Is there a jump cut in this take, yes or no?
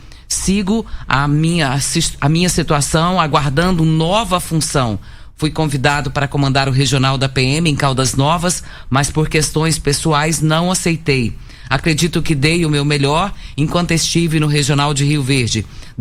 no